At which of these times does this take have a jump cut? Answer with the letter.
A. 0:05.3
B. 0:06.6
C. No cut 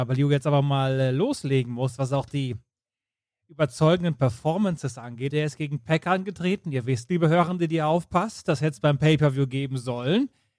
A